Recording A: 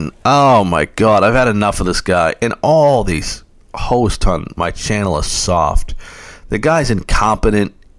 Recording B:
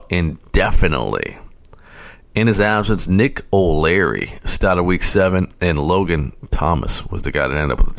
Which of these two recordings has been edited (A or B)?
A